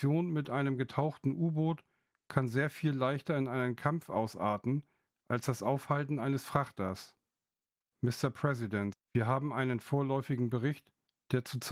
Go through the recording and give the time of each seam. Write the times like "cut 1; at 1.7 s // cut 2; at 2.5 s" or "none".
cut 1; at 7.9 s // cut 2; at 8.9 s

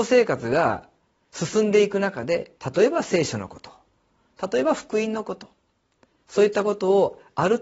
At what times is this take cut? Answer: cut 1; at 2.6 s

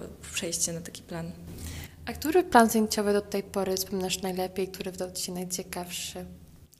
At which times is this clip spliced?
none

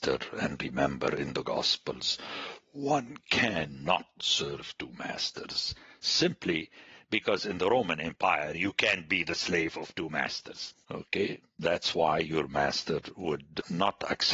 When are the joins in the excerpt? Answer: cut 1; at 10.7 s

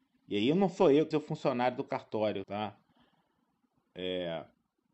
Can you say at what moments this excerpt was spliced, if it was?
cut 1; at 1.1 s // cut 2; at 2.4 s

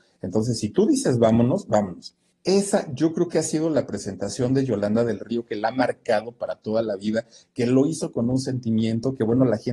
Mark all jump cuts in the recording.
cut 1; at 2.3 s

